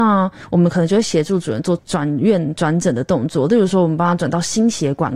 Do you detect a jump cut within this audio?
yes; 1 cut; at 1.8 s

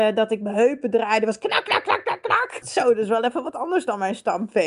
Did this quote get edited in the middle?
yes; 1 cut; at 2.6 s

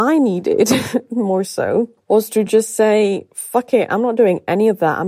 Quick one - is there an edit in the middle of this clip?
no; 0 cuts

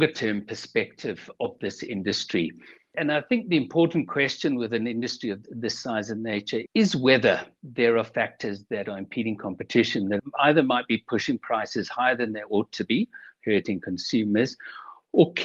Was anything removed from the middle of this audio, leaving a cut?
no; 0 cuts

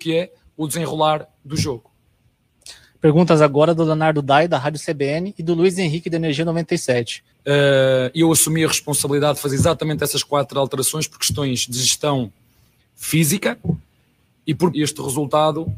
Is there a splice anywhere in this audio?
yes; 2 cuts; at 7.3 s, 14.7 s

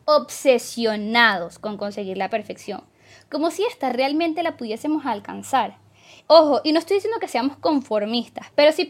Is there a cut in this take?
no; 0 cuts

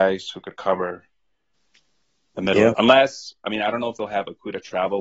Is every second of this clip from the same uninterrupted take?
no; 1 cut; at 2.7 s

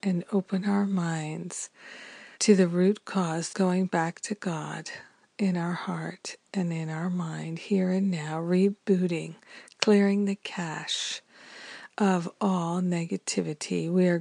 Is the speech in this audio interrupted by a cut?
yes; 2 cuts; at 2.3 s, 3.5 s

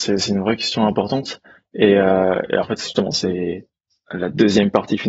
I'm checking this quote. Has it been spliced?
no; 0 cuts

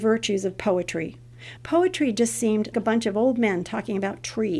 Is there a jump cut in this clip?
yes; 2 cuts; at 1.6 s, 2.7 s

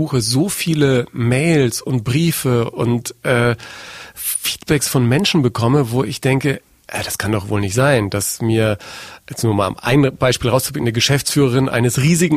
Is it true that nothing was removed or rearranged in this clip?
yes; 0 cuts

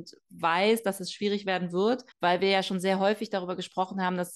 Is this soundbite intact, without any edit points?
no; 1 cut; at 2.1 s

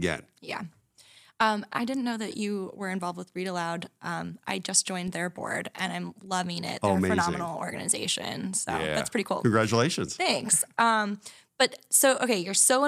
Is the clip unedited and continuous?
yes; 0 cuts

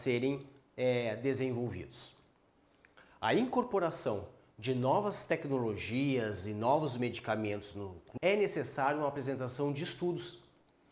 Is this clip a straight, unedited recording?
no; 1 cut; at 8.2 s

